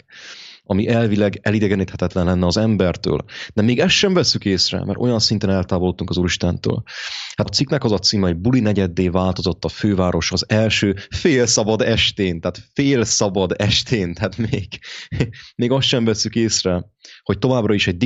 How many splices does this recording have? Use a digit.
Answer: 1